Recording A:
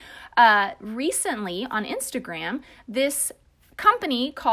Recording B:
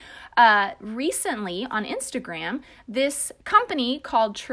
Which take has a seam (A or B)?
B